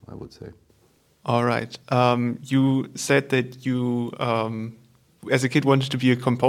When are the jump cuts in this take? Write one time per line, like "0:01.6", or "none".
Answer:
none